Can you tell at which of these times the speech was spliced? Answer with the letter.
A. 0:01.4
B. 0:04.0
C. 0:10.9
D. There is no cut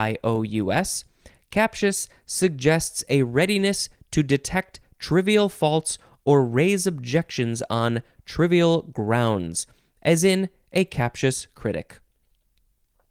D